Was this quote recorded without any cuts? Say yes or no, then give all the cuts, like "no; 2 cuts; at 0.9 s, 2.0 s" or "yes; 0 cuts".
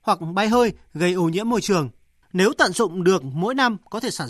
no; 1 cut; at 2.2 s